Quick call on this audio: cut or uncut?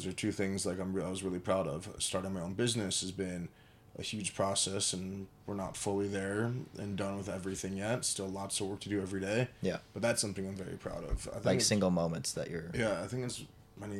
uncut